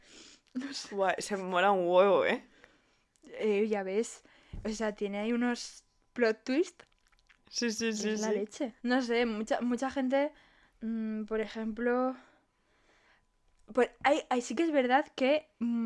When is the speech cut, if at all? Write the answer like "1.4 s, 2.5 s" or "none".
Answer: 8.8 s